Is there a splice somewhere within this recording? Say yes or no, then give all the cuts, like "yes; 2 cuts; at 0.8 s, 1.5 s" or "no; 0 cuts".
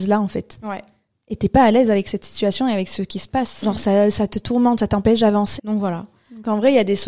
yes; 3 cuts; at 1.1 s, 3.6 s, 5.6 s